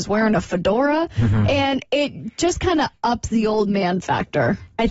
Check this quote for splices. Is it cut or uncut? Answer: uncut